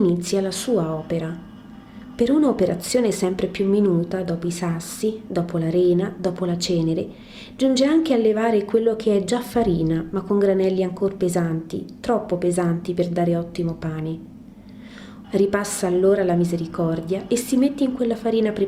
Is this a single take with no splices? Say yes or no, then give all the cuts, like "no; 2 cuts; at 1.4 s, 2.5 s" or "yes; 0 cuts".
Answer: no; 1 cut; at 15.2 s